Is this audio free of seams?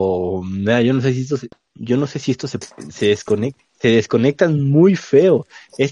no; 1 cut; at 2.6 s

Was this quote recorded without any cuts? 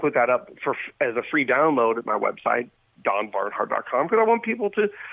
yes; 0 cuts

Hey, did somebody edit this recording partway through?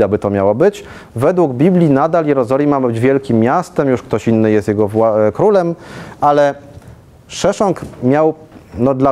no; 0 cuts

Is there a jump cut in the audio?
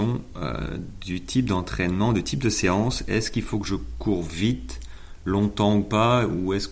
no; 0 cuts

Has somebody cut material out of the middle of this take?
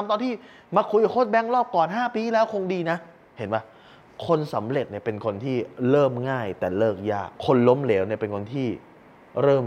yes; 1 cut; at 7.4 s

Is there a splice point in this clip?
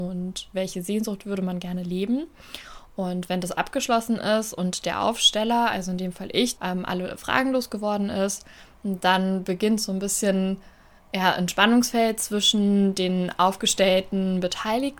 yes; 1 cut; at 6.6 s

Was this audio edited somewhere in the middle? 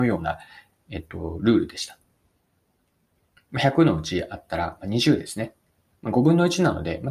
no; 0 cuts

